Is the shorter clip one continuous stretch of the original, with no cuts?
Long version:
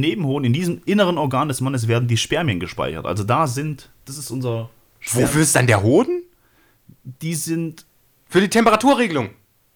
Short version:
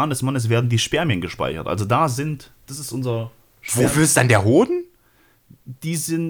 yes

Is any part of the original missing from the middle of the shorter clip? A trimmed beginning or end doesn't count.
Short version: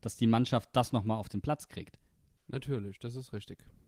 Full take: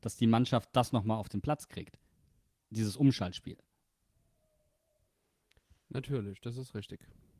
yes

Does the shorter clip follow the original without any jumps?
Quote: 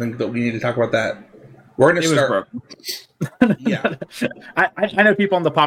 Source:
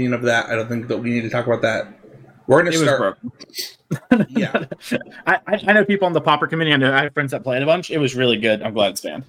yes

